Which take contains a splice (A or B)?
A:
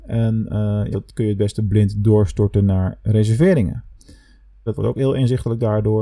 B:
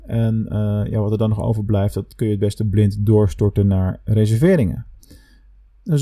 A